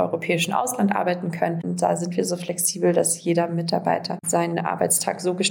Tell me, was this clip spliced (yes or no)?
yes